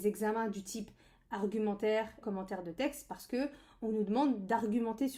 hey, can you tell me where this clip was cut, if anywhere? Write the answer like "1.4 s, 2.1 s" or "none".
2.2 s

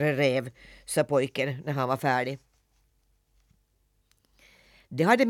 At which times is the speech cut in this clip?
none

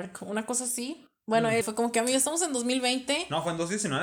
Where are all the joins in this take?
1.6 s

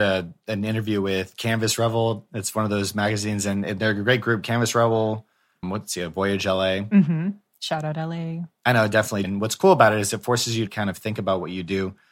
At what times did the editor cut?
5.6 s, 9.2 s, 10.7 s

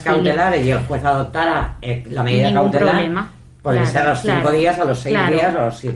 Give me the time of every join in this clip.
none

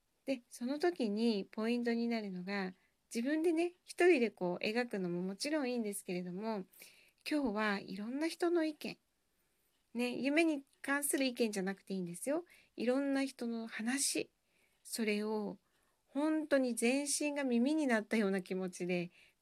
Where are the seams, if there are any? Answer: none

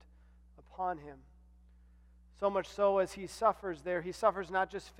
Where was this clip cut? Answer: none

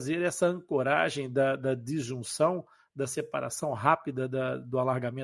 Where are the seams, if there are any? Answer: none

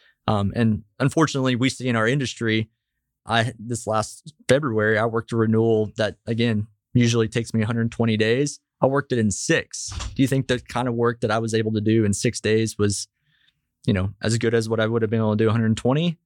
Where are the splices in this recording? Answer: none

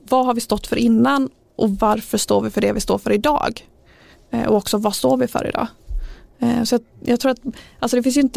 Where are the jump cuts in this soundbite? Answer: none

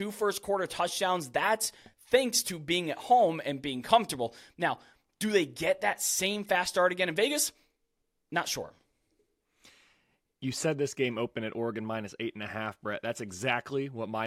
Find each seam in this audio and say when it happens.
none

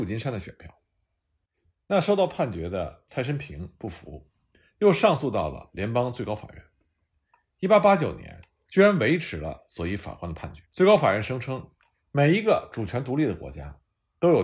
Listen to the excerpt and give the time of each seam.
8.7 s, 10.6 s

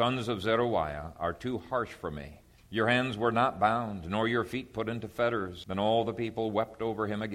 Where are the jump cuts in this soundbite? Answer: 2.6 s, 5.6 s

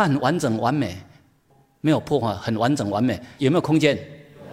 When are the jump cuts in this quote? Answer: 3.4 s

